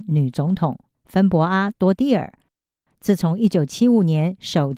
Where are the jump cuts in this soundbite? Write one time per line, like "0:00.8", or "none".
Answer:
0:02.9